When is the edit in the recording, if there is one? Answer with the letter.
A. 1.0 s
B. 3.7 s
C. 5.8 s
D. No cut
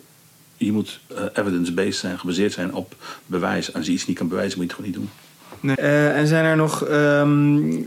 C